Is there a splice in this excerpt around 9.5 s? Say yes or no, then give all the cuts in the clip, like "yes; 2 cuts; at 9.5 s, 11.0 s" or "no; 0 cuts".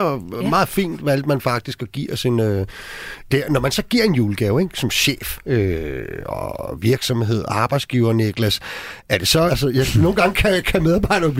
yes; 2 cuts; at 3.3 s, 9.5 s